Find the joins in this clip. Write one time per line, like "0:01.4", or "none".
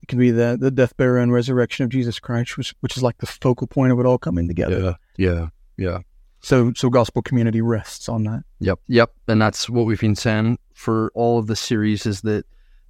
0:05.1
0:08.8
0:11.1